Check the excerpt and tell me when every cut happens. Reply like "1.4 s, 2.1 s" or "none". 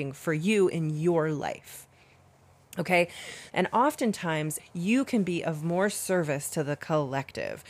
3.5 s, 4.6 s